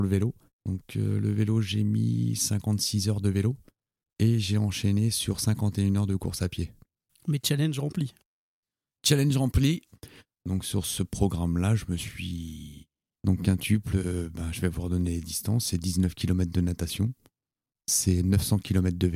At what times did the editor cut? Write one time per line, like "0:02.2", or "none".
0:07.1
0:10.3
0:13.2